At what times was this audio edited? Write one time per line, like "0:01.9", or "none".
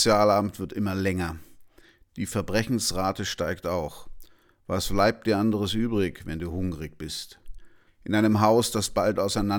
0:07.9

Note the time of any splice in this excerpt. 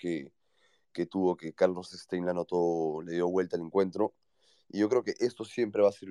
none

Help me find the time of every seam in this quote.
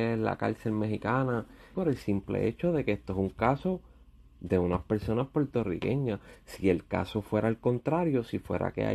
0:01.7

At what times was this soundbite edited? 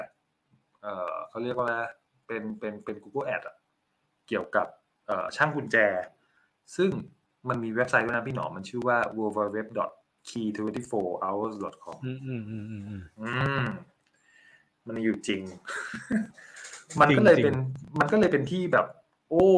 none

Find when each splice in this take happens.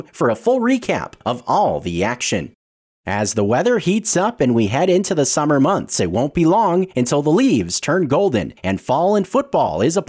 none

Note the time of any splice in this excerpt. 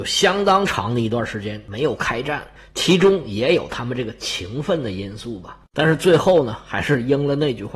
none

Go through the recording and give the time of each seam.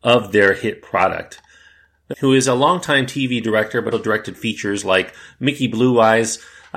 0:02.1
0:03.9

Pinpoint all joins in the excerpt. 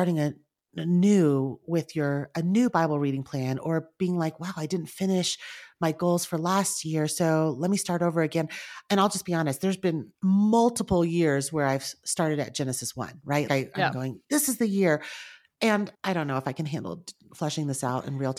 0:10.1
0:13.5
0:15.9

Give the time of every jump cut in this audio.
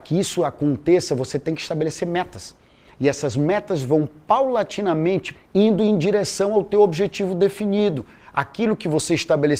0:05.3

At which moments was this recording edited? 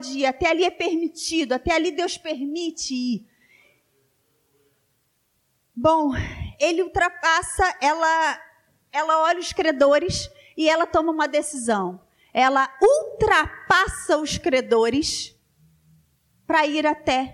none

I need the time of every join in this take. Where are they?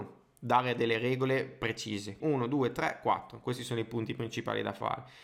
0:02.2

